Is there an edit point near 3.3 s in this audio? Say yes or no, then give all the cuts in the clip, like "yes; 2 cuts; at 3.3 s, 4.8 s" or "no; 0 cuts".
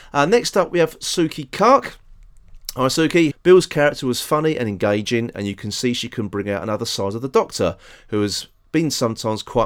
yes; 1 cut; at 3.3 s